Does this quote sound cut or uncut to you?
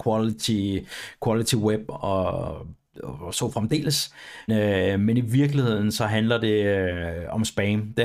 cut